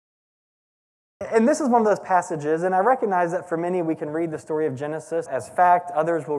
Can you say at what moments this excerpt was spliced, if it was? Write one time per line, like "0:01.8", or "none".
0:05.3